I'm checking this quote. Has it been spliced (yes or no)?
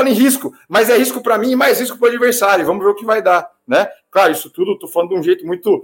no